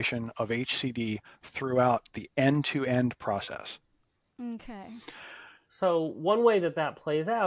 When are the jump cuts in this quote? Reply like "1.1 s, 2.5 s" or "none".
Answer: none